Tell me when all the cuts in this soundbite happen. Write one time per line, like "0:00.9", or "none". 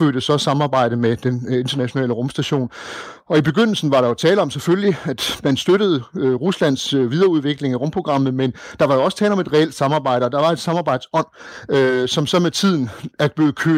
none